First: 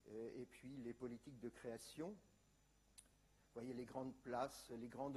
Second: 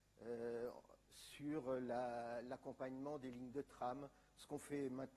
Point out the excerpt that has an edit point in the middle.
first; 1 cut; at 3.4 s

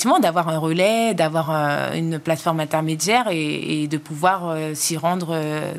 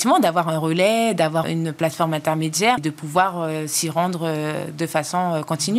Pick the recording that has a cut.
second; 2 cuts; at 1.4 s, 2.8 s

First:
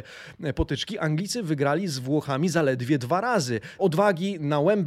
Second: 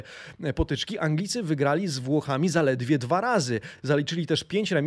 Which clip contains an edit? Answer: first; 1 cut; at 3.8 s

